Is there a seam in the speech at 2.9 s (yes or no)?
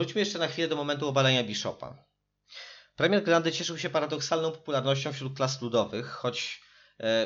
no